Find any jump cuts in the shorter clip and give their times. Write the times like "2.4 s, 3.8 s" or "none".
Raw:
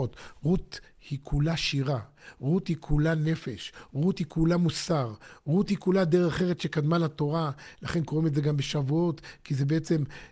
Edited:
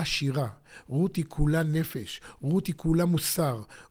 none

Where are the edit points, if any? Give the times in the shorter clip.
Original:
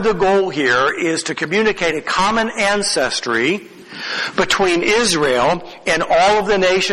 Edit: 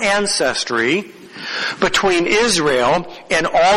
none

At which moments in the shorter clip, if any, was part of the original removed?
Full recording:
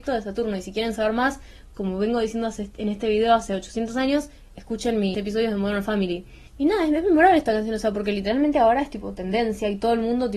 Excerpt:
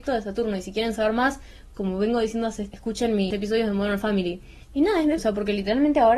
2.7 s, 5.2 s

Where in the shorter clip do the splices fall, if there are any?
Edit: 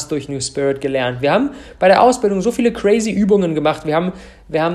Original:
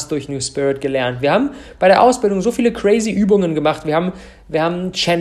none

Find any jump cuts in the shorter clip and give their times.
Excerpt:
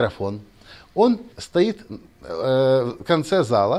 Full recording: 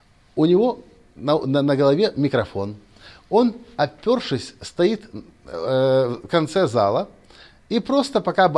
1.3 s

